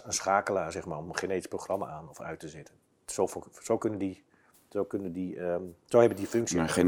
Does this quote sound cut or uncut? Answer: uncut